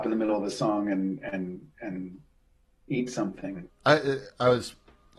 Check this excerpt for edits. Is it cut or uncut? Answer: cut